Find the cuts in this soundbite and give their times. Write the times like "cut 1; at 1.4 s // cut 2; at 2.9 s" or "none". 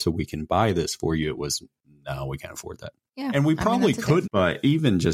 cut 1; at 3.1 s // cut 2; at 4.2 s

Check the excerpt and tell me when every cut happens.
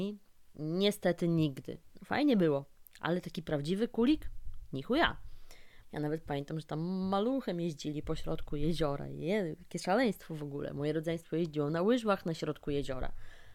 cut 1; at 2.0 s // cut 2; at 5.8 s

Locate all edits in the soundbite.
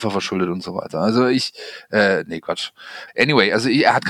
cut 1; at 3.1 s

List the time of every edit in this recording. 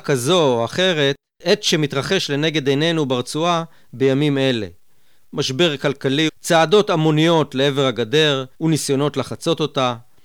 cut 1; at 6.3 s // cut 2; at 8.5 s

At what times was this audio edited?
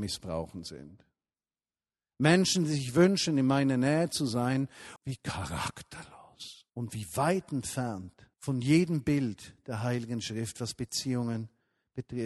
cut 1; at 5.0 s // cut 2; at 6.7 s // cut 3; at 8.3 s

